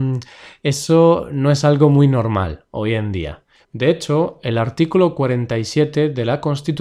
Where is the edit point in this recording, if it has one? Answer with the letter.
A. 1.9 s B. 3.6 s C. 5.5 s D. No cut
B